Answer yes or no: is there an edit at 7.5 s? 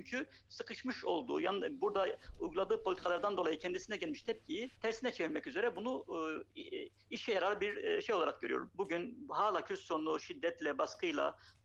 no